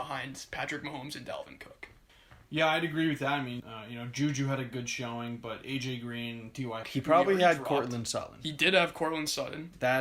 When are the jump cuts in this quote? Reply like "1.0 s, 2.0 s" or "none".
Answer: 3.6 s, 6.8 s